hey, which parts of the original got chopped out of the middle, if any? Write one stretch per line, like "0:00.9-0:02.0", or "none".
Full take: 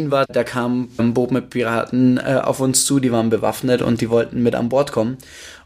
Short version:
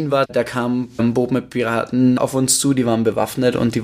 0:02.2-0:02.4